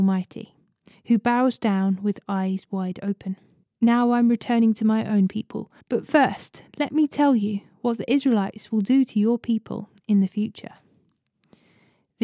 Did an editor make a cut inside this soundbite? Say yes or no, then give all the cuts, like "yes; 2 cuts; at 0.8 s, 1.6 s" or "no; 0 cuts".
yes; 2 cuts; at 3.6 s, 5.8 s